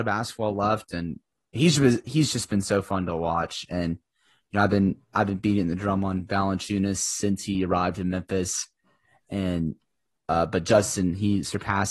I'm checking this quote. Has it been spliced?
no; 0 cuts

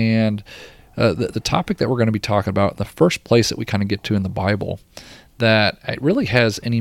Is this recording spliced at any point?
no; 0 cuts

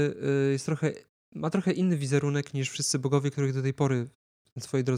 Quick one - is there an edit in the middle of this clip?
no; 0 cuts

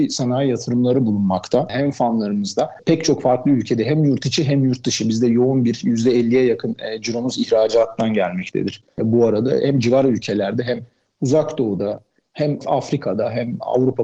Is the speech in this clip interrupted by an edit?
no; 0 cuts

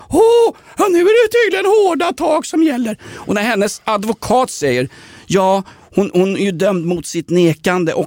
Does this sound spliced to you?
no; 0 cuts

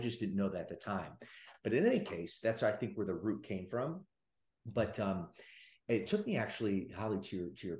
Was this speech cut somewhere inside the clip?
no; 0 cuts

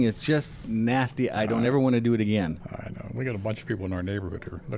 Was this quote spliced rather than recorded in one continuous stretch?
no; 0 cuts

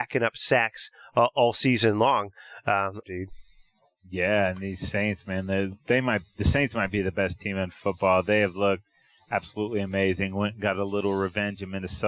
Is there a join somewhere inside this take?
yes; 1 cut; at 3.0 s

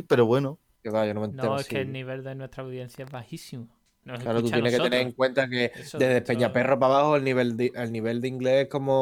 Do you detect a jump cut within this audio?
yes; 1 cut; at 4.0 s

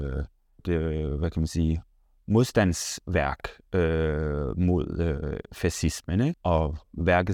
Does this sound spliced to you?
yes; 1 cut; at 6.3 s

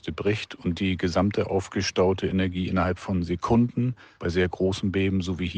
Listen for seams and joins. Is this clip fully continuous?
yes; 0 cuts

